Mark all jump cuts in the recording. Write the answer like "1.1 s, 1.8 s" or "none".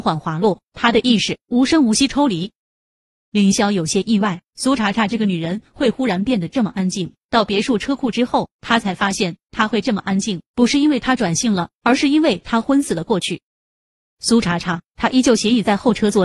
14.9 s